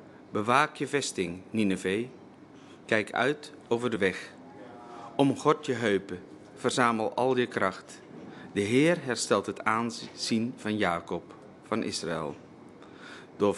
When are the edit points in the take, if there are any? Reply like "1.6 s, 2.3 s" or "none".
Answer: none